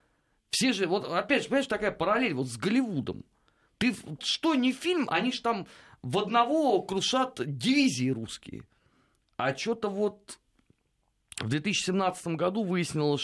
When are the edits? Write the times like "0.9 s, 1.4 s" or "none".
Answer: 4.2 s

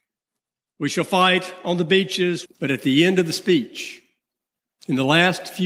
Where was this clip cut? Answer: 2.4 s

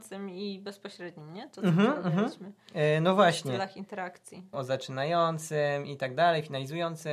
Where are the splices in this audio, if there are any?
4.5 s

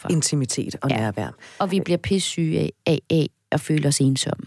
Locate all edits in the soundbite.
none

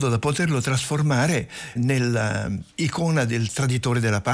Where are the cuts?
1.8 s

